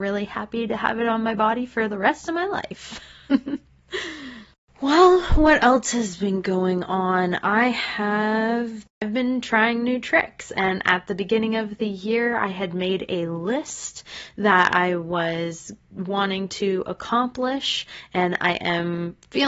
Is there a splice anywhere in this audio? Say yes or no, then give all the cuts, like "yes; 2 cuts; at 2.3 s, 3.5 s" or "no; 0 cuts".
no; 0 cuts